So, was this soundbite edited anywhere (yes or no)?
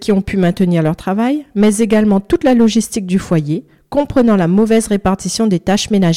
no